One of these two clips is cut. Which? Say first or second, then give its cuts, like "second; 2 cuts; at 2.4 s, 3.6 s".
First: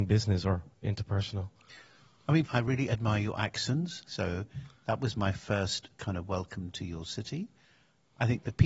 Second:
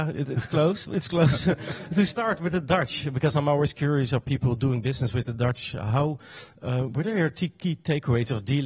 first; 2 cuts; at 2.4 s, 4.1 s